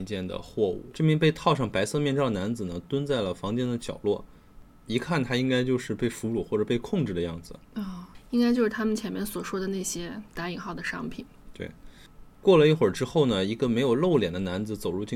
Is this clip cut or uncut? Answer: cut